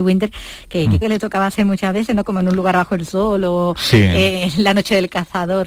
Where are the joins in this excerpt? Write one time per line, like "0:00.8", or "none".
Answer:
0:01.0